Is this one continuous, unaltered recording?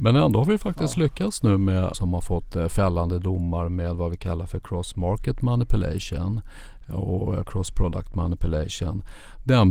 no; 1 cut; at 1.9 s

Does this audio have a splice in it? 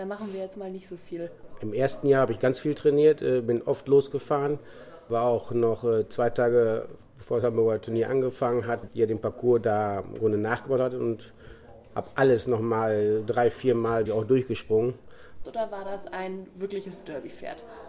yes; 3 cuts; at 8.9 s, 14.1 s, 15.4 s

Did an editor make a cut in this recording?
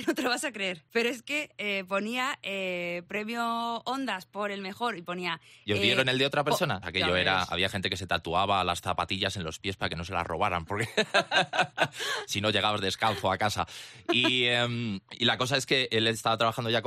yes; 1 cut; at 6.8 s

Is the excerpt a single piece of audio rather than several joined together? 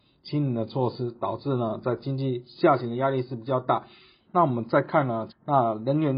no; 2 cuts; at 4.2 s, 5.3 s

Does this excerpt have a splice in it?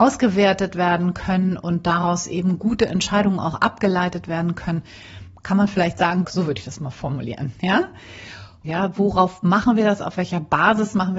yes; 2 cuts; at 6.2 s, 8.6 s

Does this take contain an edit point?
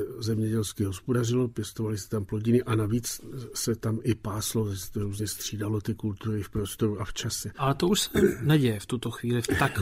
no; 0 cuts

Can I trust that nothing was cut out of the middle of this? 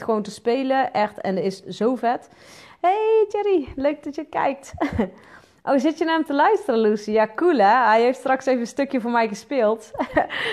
yes; 0 cuts

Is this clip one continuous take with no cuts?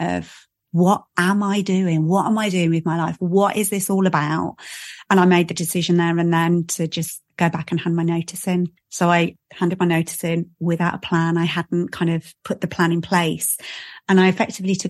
yes; 0 cuts

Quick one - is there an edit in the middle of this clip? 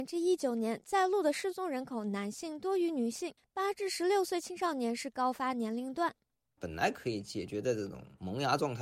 yes; 1 cut; at 6.6 s

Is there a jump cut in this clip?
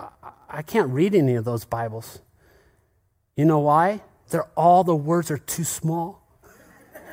yes; 1 cut; at 4.2 s

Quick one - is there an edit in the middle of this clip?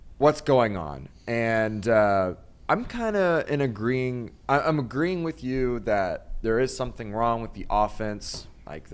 no; 0 cuts

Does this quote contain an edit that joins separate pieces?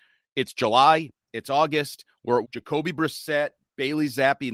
yes; 1 cut; at 2.4 s

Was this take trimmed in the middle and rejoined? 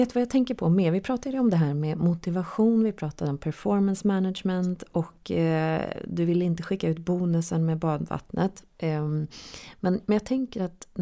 no; 0 cuts

